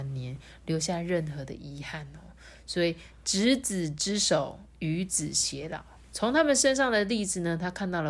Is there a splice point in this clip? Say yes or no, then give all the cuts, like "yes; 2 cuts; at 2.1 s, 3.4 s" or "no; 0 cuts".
no; 0 cuts